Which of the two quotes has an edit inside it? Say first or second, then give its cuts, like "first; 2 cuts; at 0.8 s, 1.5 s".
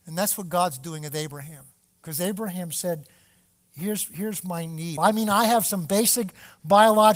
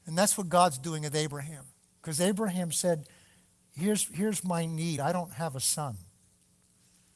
first; 1 cut; at 5.0 s